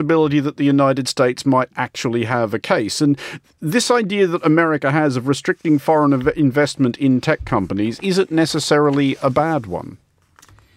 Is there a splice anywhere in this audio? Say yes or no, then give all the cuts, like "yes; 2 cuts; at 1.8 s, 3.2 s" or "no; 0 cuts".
no; 0 cuts